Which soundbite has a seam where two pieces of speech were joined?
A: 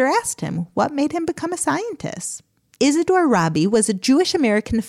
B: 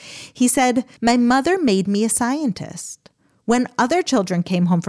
A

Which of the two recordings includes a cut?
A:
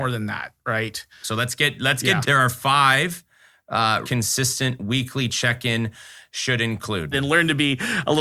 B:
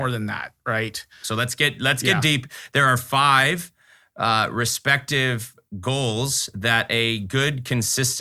A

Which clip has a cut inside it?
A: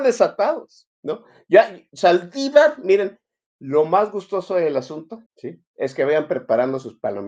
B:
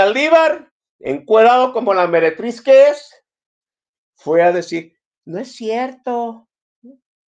A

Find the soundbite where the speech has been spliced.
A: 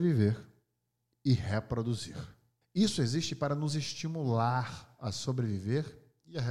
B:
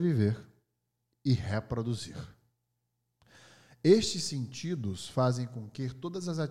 A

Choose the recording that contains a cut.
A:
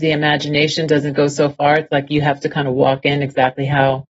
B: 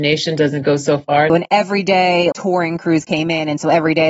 B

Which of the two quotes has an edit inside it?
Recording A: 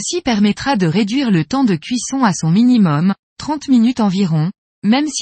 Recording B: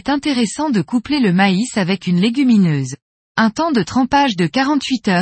B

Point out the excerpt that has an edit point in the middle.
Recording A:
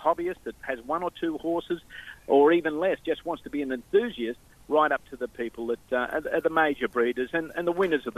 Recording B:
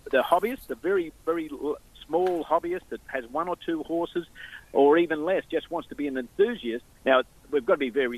B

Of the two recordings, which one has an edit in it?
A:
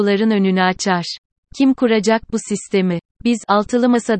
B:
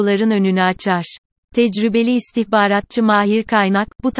A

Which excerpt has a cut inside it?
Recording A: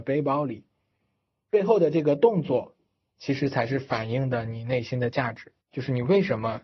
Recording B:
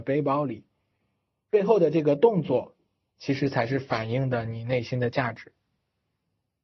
A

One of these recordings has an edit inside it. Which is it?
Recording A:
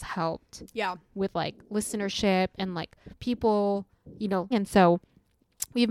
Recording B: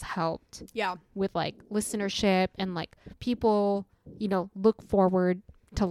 A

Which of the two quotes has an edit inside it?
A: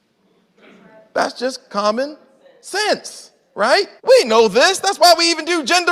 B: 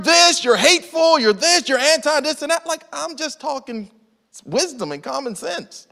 A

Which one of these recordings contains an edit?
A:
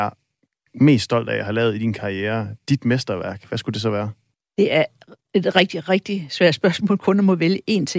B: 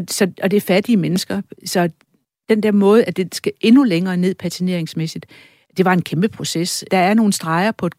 B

